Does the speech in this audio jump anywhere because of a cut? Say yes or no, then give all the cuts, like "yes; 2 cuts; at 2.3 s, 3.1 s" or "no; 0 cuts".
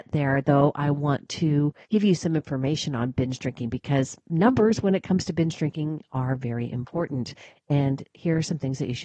yes; 1 cut; at 1.8 s